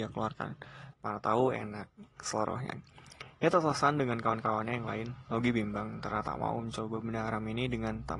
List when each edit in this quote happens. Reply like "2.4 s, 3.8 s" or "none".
0.9 s